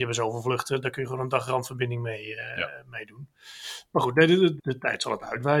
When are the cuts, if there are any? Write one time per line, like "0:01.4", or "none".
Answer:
0:04.6